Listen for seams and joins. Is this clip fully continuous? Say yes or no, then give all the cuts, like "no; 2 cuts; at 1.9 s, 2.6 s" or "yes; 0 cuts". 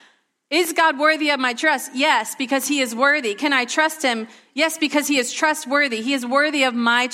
yes; 0 cuts